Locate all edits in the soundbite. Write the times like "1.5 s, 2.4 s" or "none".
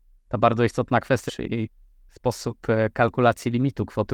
1.3 s